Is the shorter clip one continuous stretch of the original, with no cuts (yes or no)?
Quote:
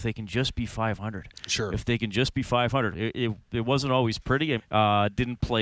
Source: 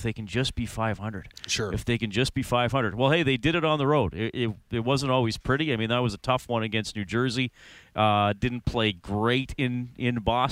no